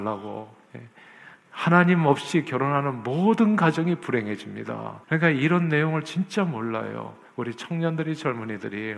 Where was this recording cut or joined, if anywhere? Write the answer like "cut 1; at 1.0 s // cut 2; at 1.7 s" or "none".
cut 1; at 5.0 s